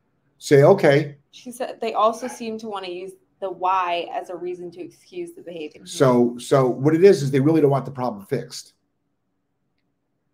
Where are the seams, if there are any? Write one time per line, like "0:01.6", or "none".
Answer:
0:01.3
0:05.8

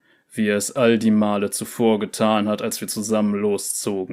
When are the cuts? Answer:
none

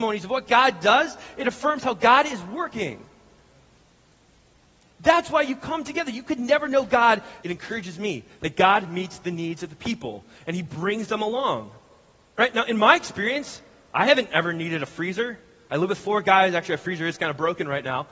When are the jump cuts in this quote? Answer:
0:07.4

